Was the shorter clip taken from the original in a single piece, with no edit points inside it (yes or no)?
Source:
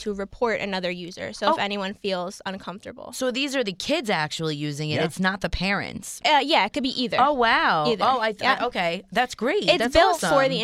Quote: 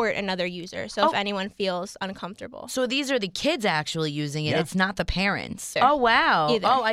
no